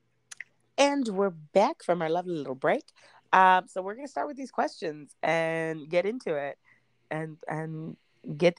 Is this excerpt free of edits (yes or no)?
yes